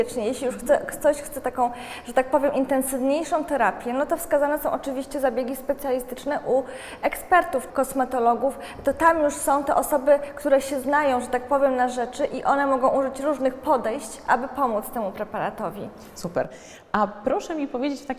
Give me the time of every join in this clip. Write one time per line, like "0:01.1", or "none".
0:07.7